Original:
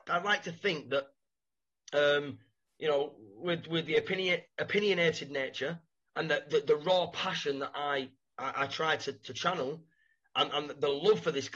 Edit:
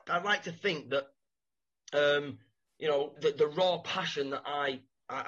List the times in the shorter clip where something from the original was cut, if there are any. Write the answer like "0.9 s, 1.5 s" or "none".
3.2 s